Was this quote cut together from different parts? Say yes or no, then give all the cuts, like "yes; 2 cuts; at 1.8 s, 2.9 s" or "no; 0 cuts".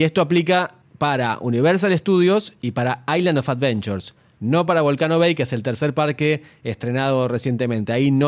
no; 0 cuts